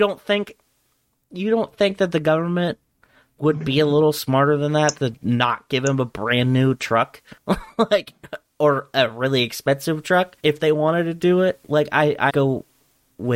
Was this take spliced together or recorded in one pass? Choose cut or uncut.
cut